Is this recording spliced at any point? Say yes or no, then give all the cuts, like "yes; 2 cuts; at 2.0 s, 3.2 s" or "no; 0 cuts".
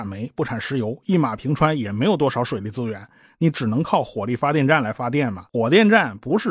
yes; 1 cut; at 5.5 s